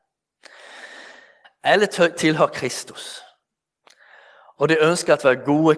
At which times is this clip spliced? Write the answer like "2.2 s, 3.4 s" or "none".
1.4 s